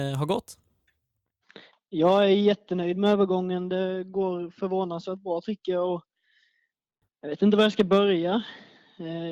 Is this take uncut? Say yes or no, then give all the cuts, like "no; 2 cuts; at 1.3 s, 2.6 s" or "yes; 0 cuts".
no; 1 cut; at 7.0 s